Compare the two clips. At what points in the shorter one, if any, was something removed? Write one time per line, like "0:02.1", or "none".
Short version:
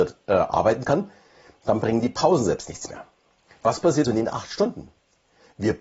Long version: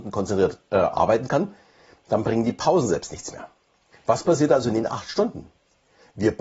0:04.0